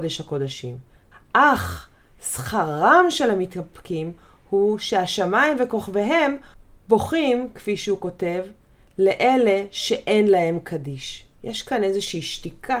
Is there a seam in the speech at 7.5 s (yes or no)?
no